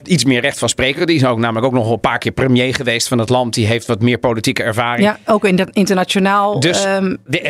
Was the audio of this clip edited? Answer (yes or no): no